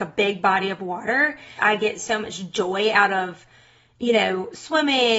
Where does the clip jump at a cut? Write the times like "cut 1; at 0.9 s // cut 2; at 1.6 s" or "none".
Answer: cut 1; at 1.6 s